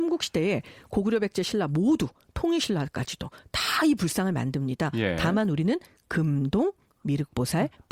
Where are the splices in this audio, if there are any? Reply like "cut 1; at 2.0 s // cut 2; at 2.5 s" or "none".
none